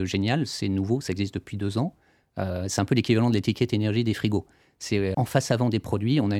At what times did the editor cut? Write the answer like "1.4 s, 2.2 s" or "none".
5.1 s